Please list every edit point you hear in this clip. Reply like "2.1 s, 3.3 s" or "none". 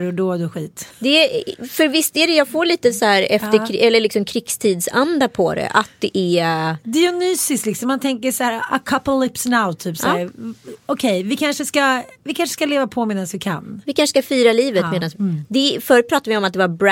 12.1 s, 15.1 s